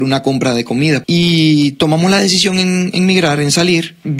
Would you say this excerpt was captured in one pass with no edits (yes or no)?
no